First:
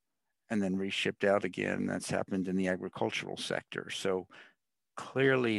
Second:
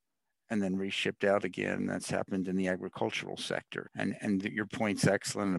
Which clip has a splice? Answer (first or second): second